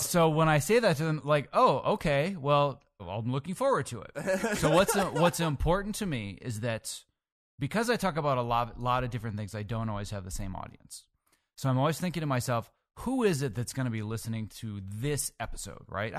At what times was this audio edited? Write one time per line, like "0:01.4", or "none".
0:03.0